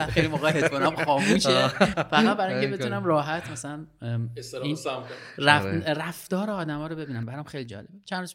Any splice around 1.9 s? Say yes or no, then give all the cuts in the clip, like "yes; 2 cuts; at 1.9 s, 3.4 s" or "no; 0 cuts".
yes; 1 cut; at 1.9 s